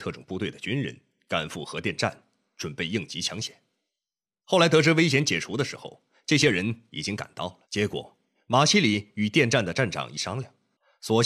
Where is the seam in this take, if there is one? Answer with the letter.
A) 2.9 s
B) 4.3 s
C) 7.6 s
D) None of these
C